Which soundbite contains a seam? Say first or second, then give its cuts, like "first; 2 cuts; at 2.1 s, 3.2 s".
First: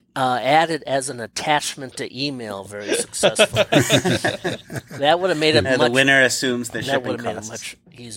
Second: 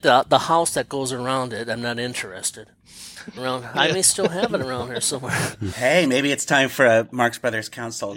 second; 1 cut; at 3.4 s